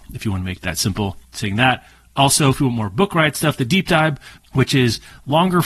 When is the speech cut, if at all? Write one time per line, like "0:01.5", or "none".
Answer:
0:01.2
0:04.4